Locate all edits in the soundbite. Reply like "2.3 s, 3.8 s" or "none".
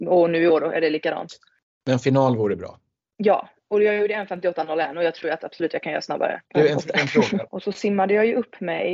6.5 s, 7.5 s